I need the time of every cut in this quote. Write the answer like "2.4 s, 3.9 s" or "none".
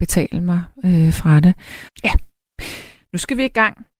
1.9 s

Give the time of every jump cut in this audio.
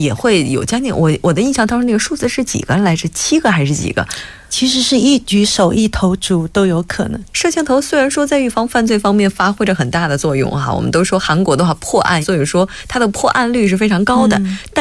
7.3 s, 12.2 s

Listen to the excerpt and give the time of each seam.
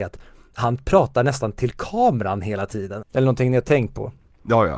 3.0 s

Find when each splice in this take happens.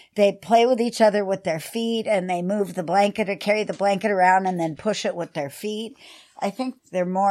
none

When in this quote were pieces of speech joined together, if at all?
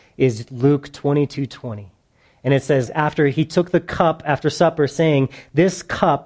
2.9 s

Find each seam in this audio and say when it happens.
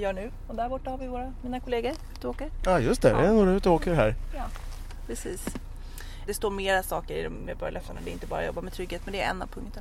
6.3 s

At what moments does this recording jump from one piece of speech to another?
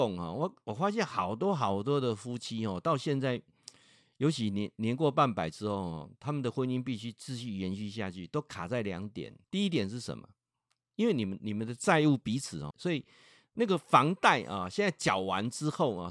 9.4 s, 12.7 s

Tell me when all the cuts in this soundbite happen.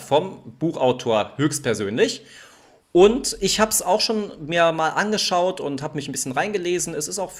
none

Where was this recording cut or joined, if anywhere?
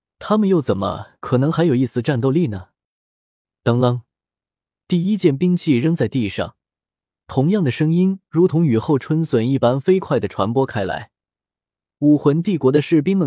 none

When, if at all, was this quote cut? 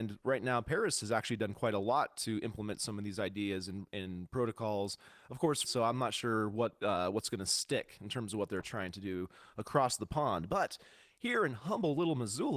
5.6 s

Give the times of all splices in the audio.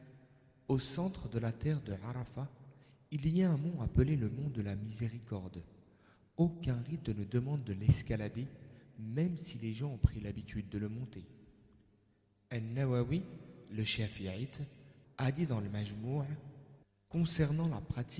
15.0 s

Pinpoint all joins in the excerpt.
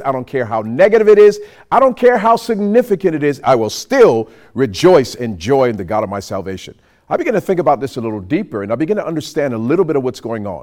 3.4 s

